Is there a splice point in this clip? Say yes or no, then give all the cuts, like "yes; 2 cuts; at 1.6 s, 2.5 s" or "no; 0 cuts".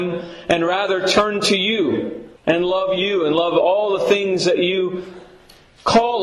yes; 1 cut; at 2.4 s